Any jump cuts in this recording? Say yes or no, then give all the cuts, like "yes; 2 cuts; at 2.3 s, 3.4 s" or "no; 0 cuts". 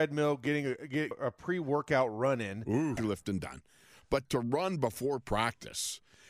yes; 3 cuts; at 1.1 s, 3.0 s, 4.3 s